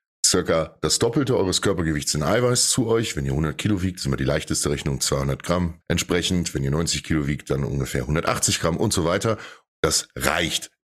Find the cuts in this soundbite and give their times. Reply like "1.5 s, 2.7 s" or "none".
5.8 s, 9.7 s